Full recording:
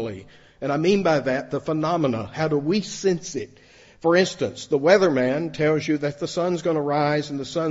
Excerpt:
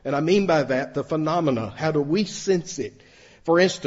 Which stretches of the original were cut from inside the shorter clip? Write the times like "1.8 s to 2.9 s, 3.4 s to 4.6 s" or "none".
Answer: none